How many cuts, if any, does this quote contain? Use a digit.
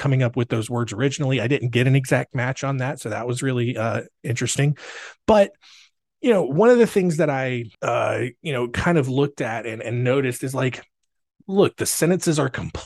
1